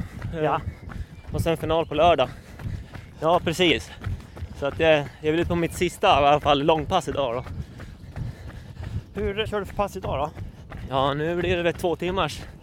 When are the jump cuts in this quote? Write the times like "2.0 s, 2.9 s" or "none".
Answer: 3.1 s, 9.5 s

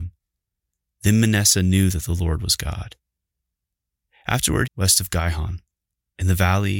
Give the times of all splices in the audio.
4.7 s

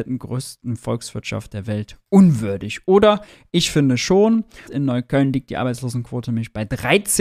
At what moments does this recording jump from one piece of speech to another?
4.7 s

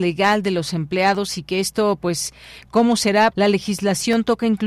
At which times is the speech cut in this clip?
3.3 s

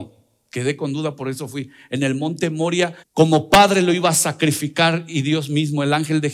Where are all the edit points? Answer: 3.0 s

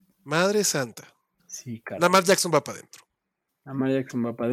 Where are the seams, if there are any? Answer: 1.4 s

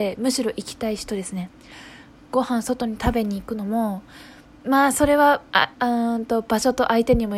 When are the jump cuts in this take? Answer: none

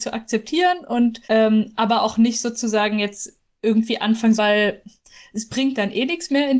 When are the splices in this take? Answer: 1.2 s, 4.4 s

